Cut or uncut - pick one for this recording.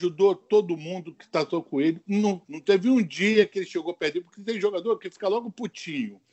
cut